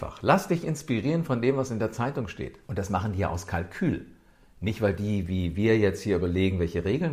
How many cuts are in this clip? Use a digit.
1